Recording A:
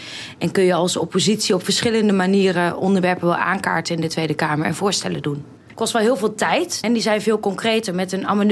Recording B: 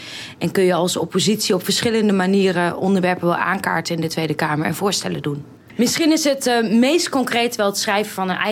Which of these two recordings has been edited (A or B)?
A